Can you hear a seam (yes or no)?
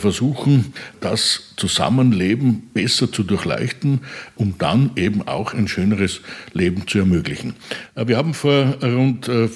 yes